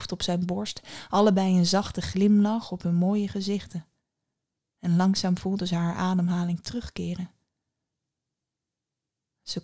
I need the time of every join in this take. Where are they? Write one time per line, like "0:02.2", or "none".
none